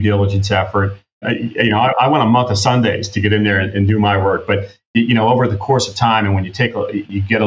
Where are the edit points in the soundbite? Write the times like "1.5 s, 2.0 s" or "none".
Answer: 1.2 s

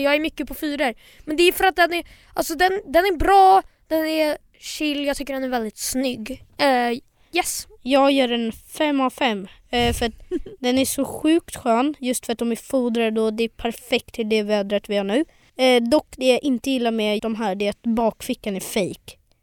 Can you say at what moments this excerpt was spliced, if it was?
15.5 s, 17.2 s

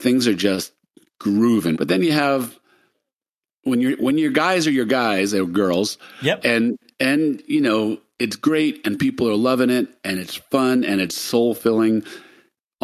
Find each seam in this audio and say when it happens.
1.7 s, 6.4 s

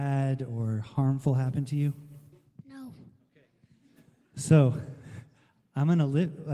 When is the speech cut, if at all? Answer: none

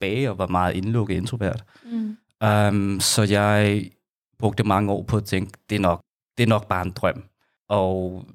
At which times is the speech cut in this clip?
none

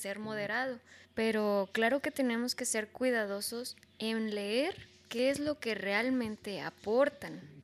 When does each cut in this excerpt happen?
1.0 s

